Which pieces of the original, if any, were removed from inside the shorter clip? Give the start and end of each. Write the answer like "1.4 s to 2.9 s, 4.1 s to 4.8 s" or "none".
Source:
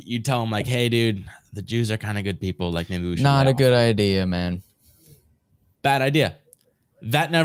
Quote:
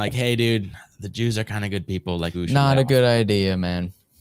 2.9 s to 3.0 s